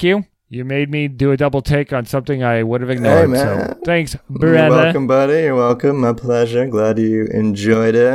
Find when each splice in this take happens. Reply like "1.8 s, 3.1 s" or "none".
none